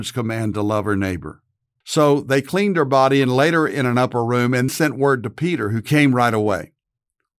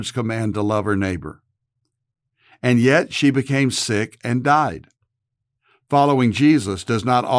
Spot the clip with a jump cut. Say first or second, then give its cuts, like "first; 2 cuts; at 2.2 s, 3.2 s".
first; 2 cuts; at 1.8 s, 4.7 s